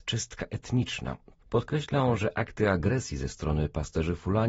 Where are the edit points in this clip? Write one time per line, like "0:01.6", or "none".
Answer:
0:01.3